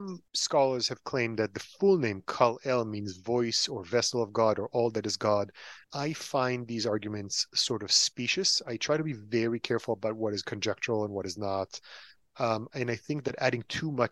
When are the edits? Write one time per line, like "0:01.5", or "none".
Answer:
0:05.8